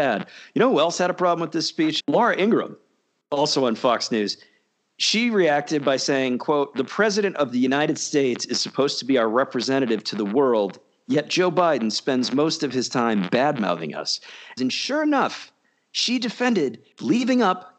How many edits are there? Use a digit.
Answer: 2